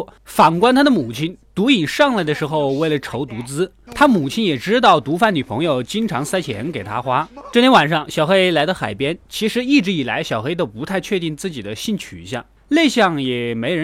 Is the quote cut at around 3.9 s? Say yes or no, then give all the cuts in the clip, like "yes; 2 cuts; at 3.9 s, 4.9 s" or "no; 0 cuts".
yes; 1 cut; at 3.9 s